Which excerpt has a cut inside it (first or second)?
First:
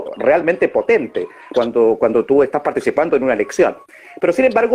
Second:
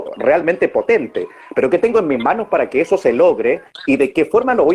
first